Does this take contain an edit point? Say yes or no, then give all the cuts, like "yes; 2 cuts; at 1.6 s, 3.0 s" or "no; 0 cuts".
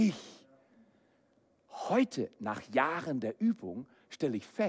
no; 0 cuts